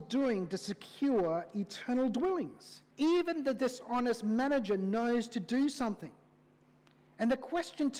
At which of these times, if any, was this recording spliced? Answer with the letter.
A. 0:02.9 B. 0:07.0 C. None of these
A